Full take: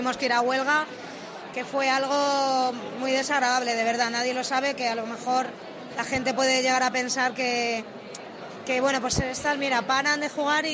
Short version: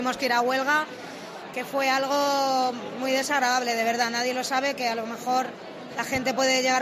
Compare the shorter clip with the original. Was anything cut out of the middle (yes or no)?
no